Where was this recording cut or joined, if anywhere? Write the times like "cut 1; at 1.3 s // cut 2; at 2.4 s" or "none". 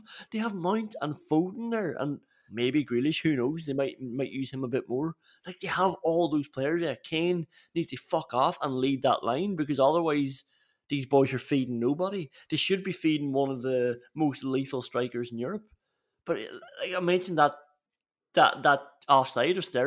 cut 1; at 2.5 s